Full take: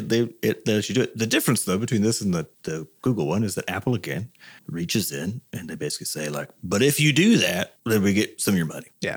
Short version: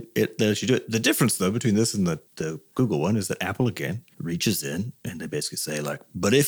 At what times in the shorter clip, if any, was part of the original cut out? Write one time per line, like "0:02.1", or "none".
0:04.1